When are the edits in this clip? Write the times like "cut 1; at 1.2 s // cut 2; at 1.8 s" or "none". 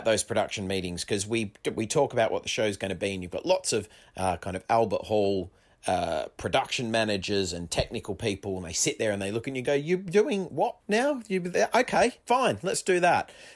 cut 1; at 10.8 s // cut 2; at 12.2 s

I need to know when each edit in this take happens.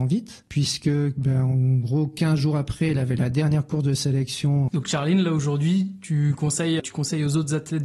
cut 1; at 4.7 s // cut 2; at 6.8 s

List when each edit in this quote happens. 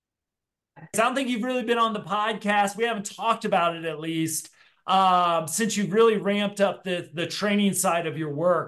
cut 1; at 0.9 s

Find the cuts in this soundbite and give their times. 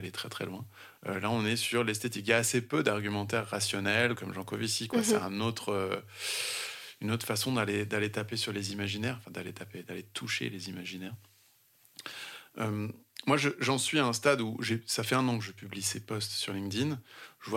cut 1; at 1.0 s // cut 2; at 4.1 s

